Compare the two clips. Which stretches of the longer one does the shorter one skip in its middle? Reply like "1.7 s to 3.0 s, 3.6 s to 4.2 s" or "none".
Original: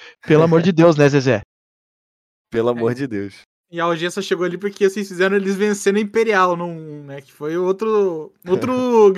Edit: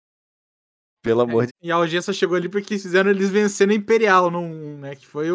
3.0 s to 3.6 s, 4.8 s to 5.0 s